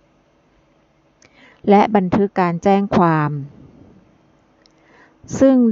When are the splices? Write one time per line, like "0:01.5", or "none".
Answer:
0:02.3